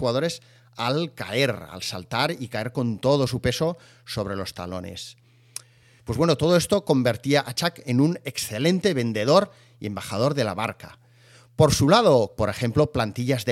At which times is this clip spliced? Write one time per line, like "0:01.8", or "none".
0:06.0
0:12.4